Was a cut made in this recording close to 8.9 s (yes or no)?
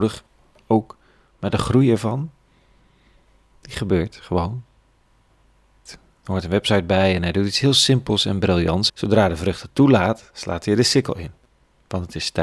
yes